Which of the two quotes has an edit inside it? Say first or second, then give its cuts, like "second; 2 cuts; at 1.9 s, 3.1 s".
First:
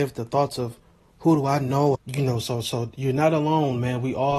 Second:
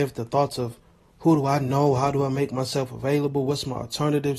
first; 1 cut; at 1.9 s